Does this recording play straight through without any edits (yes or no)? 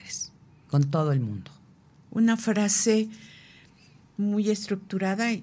yes